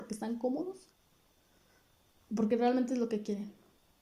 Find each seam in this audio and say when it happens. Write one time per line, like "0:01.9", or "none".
none